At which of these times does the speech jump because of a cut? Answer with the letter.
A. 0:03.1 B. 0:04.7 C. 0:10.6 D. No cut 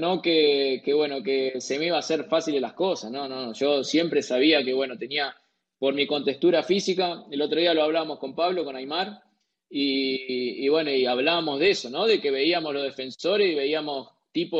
D